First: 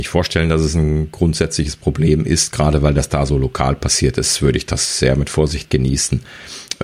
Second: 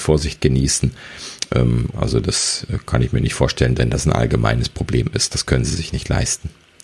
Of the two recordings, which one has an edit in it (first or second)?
second